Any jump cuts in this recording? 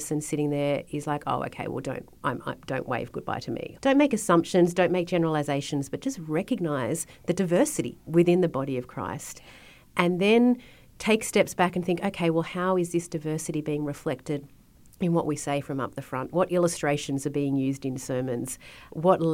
yes; 1 cut; at 3.8 s

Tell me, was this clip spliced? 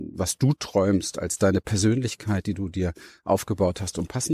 no; 0 cuts

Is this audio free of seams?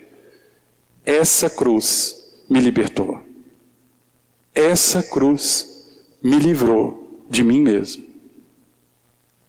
yes; 0 cuts

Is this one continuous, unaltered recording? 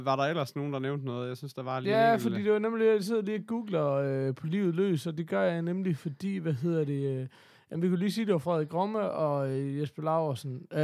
yes; 0 cuts

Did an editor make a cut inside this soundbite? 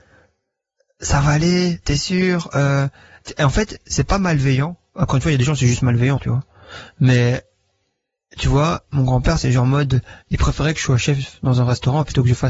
yes; 1 cut; at 6.2 s

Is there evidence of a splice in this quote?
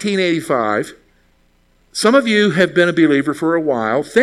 no; 0 cuts

